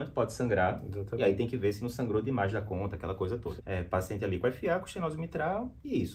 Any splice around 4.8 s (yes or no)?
no